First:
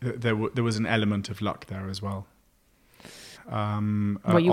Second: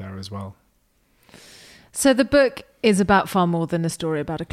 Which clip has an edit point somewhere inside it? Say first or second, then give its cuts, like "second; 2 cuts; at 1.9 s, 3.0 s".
first; 1 cut; at 3.3 s